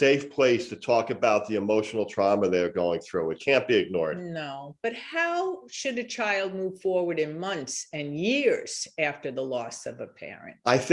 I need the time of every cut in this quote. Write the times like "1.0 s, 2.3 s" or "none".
3.4 s